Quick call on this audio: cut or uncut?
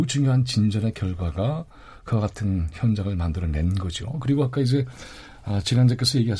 uncut